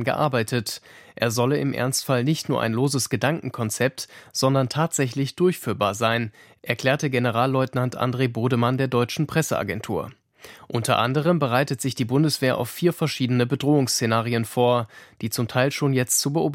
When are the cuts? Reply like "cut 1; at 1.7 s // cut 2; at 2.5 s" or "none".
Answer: none

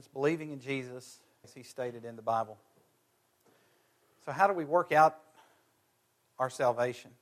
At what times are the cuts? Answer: cut 1; at 1.4 s

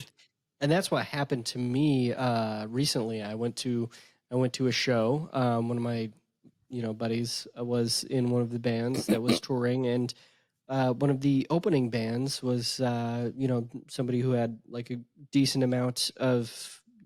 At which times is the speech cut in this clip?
none

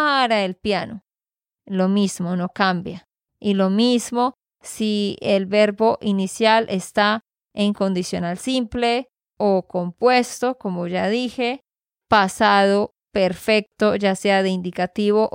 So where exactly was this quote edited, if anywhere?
none

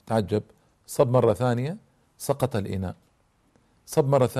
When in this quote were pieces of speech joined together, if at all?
none

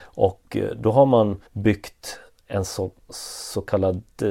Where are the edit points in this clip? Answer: cut 1; at 1.5 s

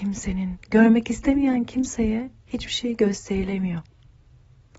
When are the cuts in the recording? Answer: none

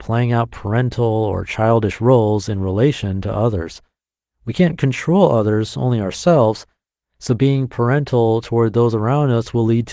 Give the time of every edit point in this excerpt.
none

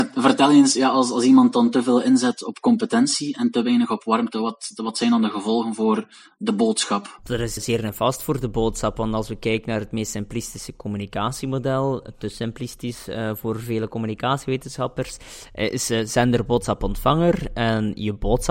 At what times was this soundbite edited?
cut 1; at 7.6 s

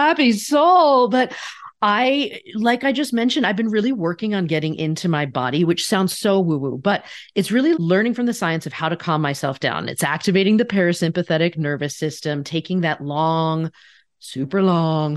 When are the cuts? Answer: cut 1; at 7.7 s

